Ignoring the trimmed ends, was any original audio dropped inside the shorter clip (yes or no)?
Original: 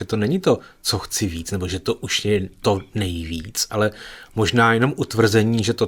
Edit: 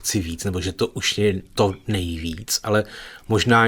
no